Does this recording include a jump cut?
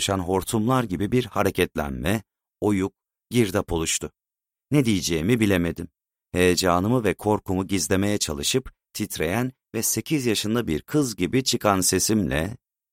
no; 0 cuts

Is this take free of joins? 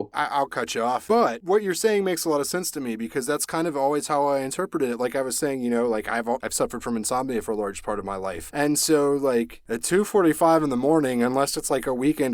yes; 0 cuts

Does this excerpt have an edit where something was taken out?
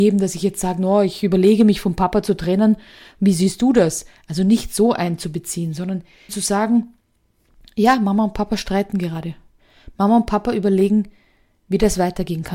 yes; 1 cut; at 6.3 s

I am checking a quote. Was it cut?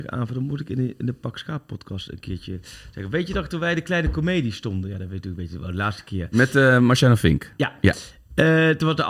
no; 0 cuts

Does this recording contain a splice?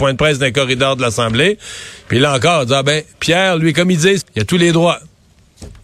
yes; 2 cuts; at 3.1 s, 4.2 s

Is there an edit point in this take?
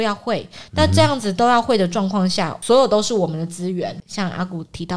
no; 0 cuts

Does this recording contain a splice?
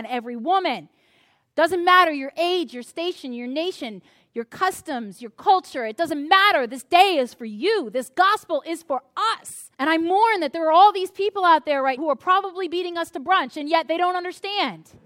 yes; 2 cuts; at 9.7 s, 12.0 s

